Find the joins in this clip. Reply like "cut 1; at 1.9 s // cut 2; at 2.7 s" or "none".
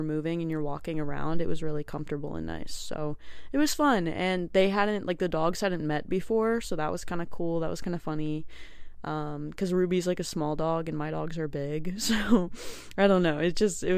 none